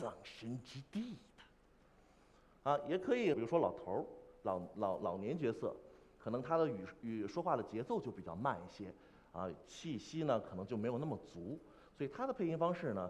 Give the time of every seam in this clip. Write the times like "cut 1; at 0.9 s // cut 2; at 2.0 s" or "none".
cut 1; at 3.3 s